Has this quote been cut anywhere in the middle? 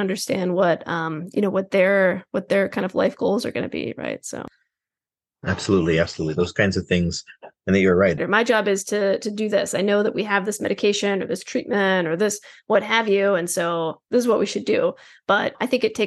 yes; 1 cut; at 8.2 s

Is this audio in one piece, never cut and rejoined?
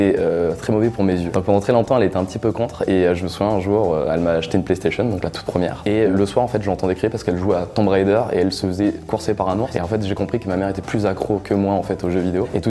yes; 0 cuts

